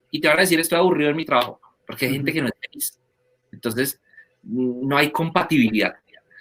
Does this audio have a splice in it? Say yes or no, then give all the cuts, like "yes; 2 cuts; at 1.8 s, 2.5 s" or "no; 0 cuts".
no; 0 cuts